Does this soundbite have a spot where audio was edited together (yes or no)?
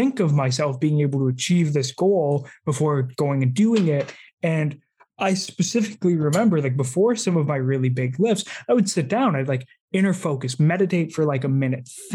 yes